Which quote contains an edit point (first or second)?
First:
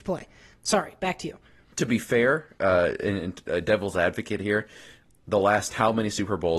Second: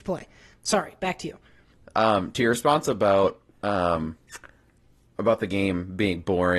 first